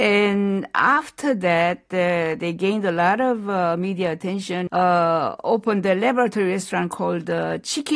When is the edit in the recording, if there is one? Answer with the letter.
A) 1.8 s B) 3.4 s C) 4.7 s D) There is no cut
C